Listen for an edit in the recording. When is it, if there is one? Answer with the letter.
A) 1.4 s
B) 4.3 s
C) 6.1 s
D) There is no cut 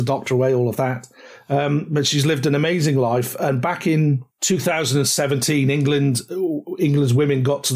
B